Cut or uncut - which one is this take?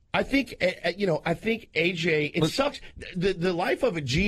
uncut